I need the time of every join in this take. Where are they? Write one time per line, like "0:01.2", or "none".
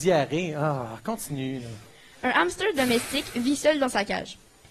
none